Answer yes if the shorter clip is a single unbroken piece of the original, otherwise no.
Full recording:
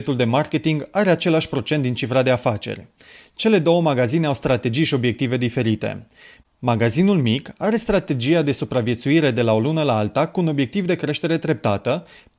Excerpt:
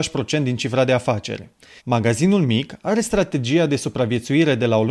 no